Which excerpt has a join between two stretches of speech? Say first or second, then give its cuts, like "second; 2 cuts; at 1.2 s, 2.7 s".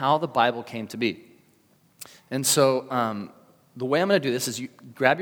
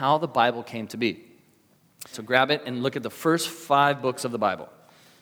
second; 1 cut; at 2.1 s